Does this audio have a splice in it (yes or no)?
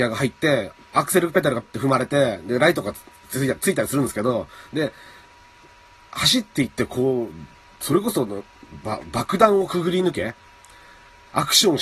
yes